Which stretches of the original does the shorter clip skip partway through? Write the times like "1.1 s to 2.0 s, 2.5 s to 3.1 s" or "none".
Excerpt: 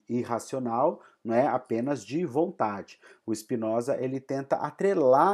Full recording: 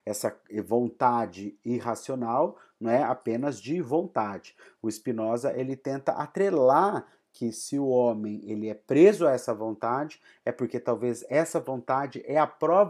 none

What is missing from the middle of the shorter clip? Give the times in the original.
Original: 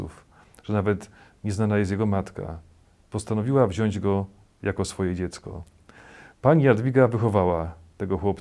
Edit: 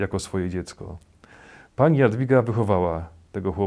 none

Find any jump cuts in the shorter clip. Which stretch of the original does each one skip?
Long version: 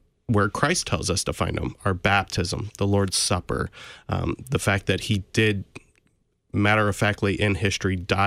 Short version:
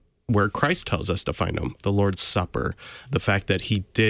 1.8 s to 2.7 s, 4.0 s to 4.4 s

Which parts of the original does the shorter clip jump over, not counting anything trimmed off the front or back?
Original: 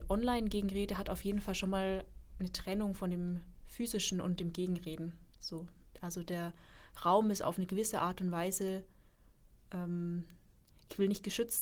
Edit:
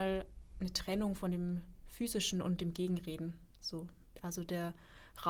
none

